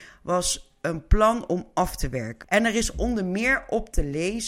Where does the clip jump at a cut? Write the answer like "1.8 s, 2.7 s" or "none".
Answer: 2.4 s